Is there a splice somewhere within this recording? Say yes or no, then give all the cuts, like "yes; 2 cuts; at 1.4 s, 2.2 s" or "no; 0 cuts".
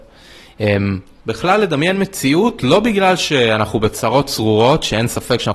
yes; 1 cut; at 1.2 s